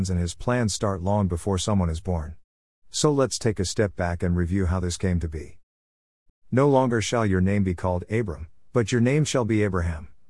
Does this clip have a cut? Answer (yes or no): yes